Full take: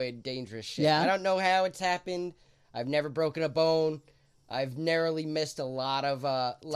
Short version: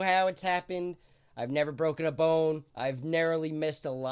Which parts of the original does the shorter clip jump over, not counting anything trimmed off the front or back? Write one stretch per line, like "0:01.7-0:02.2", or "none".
0:04.1-0:04.4